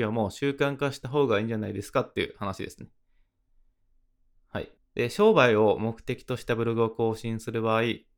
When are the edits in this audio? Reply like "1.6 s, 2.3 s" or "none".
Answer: 4.8 s